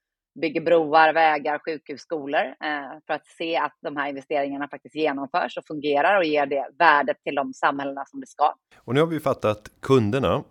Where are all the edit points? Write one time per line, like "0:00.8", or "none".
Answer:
0:08.7